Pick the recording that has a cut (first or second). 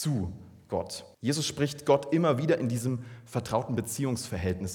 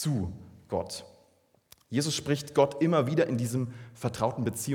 first